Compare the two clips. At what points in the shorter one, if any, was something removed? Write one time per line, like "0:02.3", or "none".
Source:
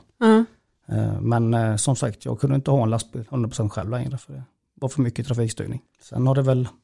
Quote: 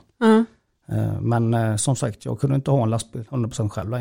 none